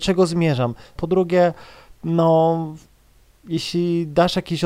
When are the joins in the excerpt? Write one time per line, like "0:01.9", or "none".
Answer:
0:01.0

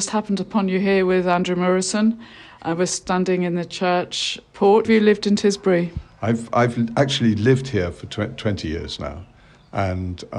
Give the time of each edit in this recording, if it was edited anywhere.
0:04.8

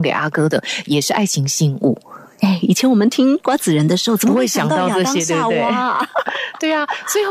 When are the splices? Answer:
none

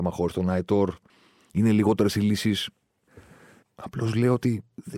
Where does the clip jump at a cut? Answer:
0:03.6

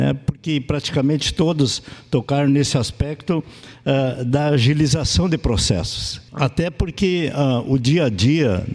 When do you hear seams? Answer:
0:06.3

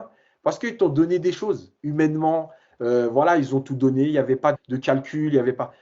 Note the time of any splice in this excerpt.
0:04.5

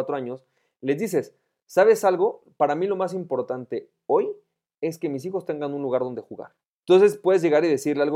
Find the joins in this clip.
0:06.8

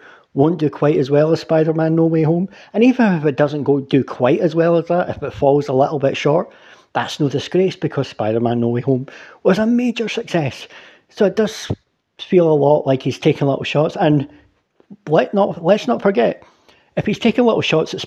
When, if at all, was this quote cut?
none

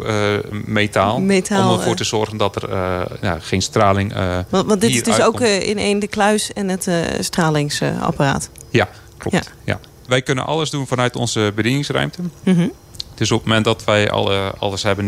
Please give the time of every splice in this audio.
0:10.1

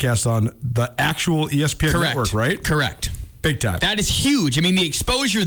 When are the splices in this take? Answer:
none

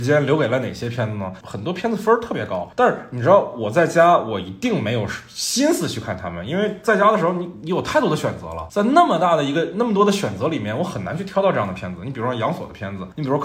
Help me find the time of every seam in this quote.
0:01.4

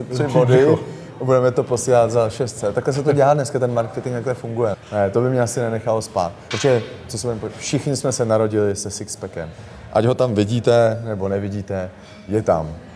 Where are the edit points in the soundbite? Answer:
0:04.7
0:06.5

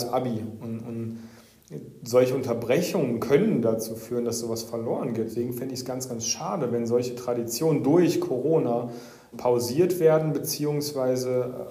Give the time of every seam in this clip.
0:05.3
0:09.3

